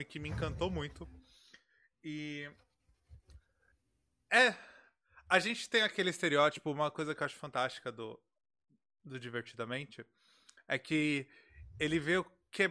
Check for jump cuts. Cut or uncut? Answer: uncut